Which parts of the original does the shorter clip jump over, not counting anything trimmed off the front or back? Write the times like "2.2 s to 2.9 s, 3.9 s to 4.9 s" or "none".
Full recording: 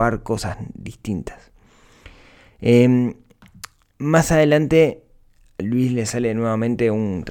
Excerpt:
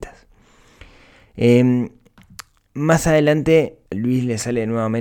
5.1 s to 5.5 s